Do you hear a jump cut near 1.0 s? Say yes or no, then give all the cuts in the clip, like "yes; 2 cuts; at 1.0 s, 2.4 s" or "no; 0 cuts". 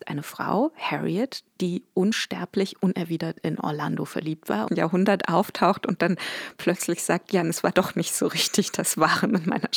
no; 2 cuts; at 4.7 s, 7.4 s